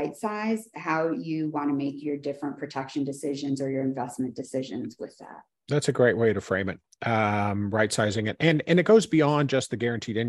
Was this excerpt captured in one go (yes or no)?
yes